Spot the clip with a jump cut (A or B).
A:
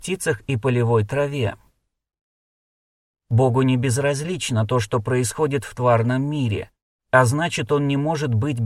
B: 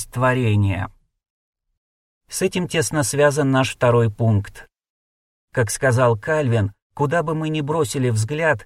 B